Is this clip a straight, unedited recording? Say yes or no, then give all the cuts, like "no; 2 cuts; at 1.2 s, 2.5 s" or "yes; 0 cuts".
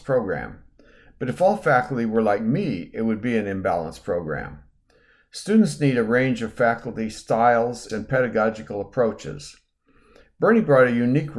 no; 1 cut; at 7.9 s